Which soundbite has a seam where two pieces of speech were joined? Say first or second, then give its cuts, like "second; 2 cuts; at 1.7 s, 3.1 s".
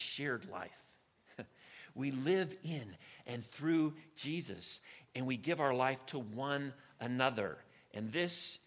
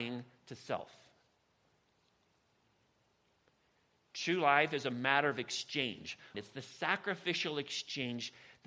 second; 1 cut; at 6.3 s